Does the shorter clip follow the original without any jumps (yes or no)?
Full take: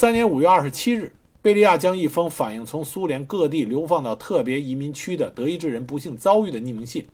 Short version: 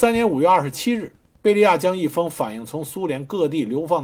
yes